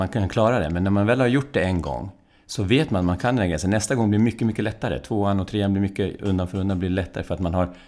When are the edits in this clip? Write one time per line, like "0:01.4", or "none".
none